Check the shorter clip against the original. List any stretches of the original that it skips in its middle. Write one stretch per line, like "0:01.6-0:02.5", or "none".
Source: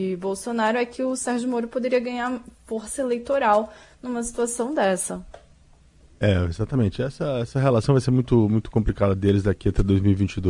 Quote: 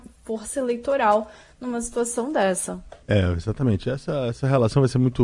0:05.4-0:06.1

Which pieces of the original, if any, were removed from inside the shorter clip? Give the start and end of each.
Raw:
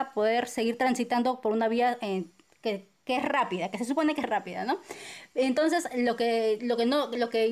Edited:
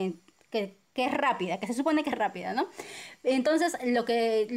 none

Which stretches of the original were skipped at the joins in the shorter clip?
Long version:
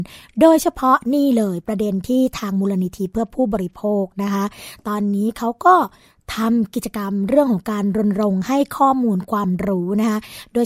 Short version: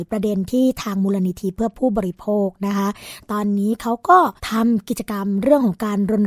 0:05.9-0:06.2

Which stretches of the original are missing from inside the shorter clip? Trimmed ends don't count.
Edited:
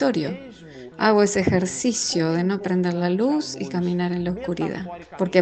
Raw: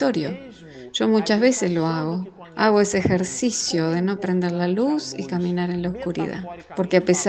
0:00.9-0:02.5

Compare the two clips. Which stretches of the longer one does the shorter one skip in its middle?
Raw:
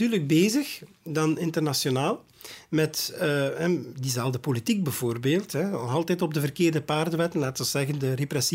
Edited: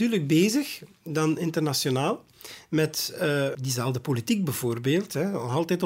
0:03.5-0:03.9

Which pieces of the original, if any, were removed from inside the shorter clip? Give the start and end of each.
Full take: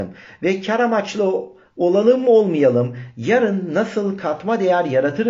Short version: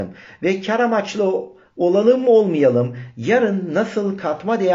none

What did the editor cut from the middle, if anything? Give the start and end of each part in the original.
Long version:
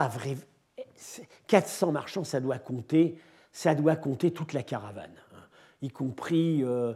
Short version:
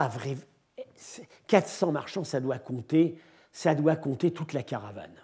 none

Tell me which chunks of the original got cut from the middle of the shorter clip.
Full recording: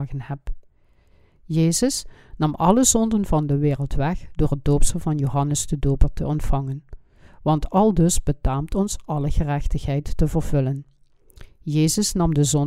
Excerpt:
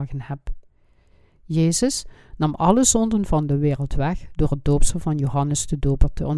none

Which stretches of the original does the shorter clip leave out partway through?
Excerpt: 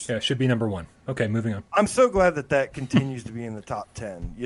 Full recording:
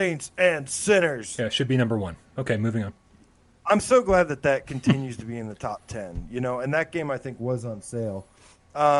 0:03.0-0:03.6

